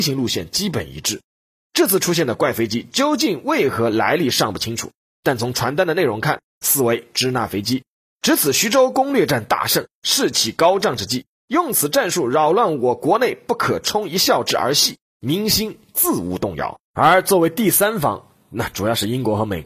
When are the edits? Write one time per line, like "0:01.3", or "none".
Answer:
0:16.8